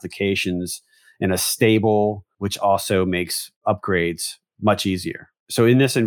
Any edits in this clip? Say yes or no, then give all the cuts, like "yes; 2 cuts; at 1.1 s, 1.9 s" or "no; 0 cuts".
yes; 1 cut; at 2.3 s